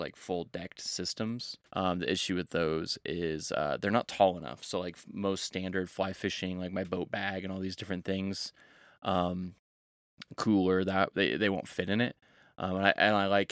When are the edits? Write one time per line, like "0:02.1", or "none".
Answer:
0:01.7